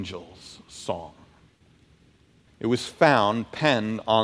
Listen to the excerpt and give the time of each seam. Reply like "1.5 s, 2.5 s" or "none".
2.5 s